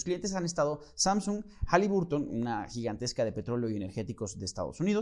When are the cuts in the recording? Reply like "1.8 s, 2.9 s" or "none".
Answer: none